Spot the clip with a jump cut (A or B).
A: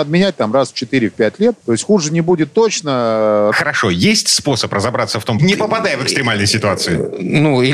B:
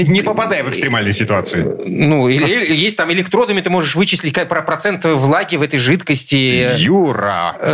A